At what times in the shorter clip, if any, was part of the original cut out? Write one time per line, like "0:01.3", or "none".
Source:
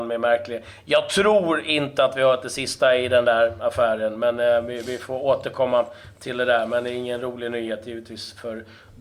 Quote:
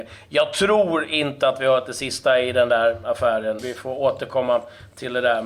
0:03.6